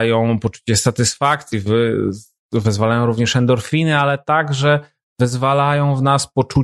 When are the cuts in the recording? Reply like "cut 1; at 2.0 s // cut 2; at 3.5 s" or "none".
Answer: none